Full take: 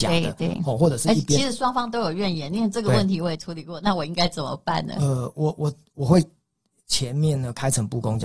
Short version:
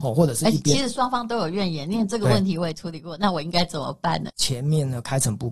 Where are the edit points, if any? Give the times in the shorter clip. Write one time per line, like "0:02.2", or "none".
0:04.3

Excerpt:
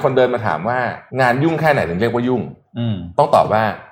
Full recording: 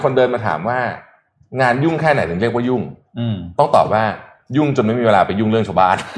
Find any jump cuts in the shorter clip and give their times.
0:01.1

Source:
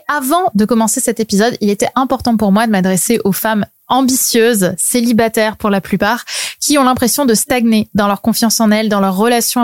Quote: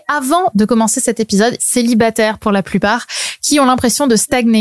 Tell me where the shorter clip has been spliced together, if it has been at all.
0:01.6

